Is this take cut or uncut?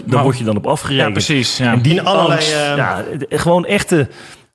uncut